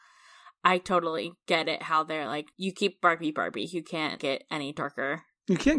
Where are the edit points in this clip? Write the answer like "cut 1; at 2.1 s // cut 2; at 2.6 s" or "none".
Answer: none